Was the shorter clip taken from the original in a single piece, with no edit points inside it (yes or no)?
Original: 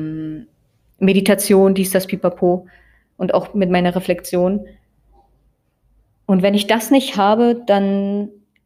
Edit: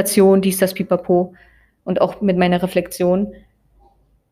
yes